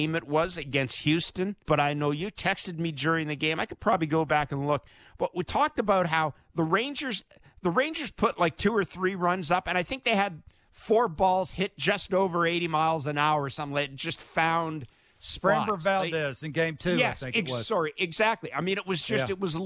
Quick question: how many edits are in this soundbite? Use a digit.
1